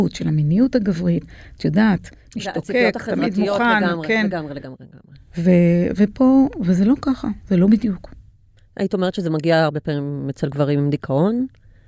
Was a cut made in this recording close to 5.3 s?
no; 0 cuts

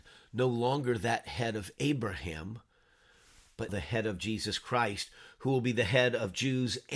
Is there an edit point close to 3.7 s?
yes; 1 cut; at 3.7 s

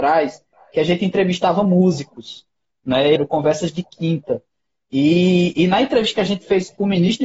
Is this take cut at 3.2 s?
yes; 1 cut; at 3.2 s

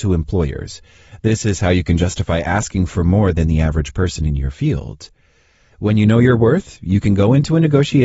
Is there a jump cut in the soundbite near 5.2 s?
no; 0 cuts

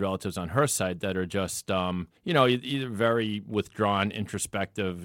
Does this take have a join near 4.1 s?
no; 1 cut; at 2.2 s

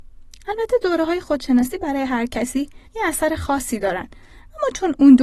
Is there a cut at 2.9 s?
yes; 1 cut; at 2.9 s

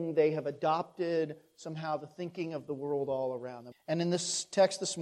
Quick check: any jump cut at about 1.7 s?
no; 1 cut; at 3.7 s

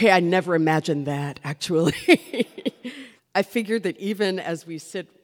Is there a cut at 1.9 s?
no; 1 cut; at 3.2 s

